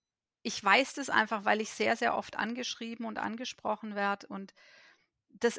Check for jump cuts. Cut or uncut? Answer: uncut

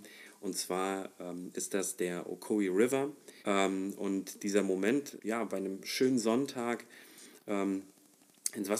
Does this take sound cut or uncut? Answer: cut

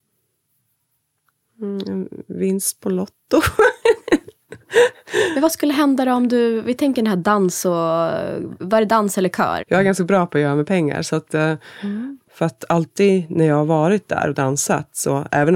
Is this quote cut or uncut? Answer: cut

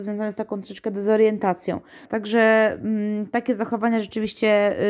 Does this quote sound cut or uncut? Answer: cut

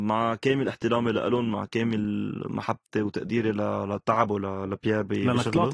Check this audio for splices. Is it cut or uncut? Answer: uncut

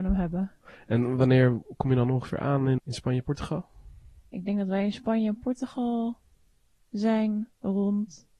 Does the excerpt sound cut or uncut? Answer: cut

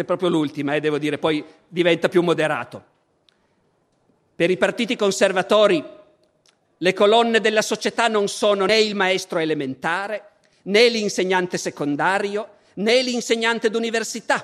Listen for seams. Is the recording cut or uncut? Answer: cut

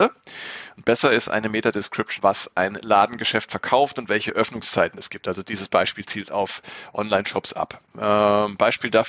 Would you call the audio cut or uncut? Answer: cut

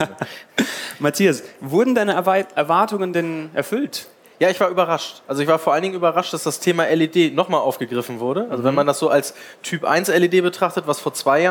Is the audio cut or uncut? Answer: uncut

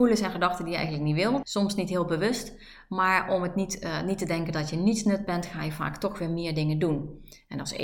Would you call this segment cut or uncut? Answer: cut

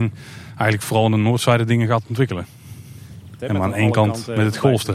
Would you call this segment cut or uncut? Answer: cut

